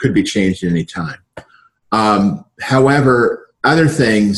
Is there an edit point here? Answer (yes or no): no